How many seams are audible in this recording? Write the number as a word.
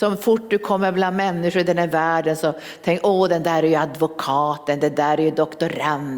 zero